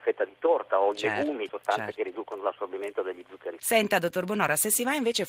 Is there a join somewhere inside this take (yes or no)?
yes